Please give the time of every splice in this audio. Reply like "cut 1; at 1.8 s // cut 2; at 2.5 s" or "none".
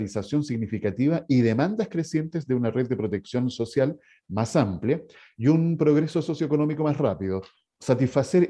none